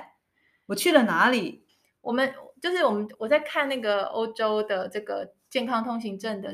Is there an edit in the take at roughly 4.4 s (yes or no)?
no